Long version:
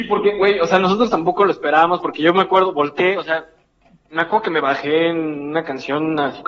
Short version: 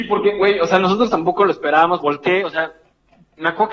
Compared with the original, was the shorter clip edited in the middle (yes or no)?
yes